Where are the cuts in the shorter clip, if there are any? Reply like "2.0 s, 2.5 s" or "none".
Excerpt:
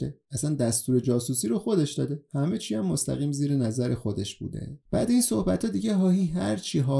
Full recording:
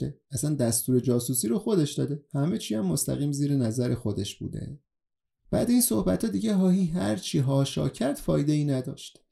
4.8 s